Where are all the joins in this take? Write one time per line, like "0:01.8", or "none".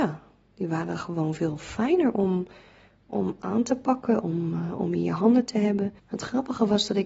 0:06.0